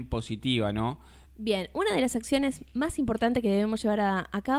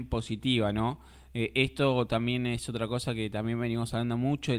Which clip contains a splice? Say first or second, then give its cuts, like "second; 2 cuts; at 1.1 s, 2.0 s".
first; 1 cut; at 1.2 s